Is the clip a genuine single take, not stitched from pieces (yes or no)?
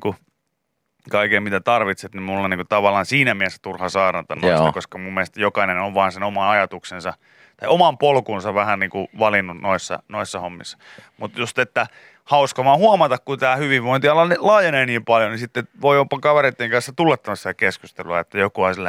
yes